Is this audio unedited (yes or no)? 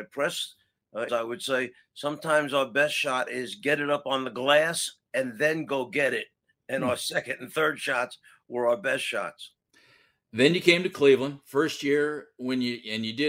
no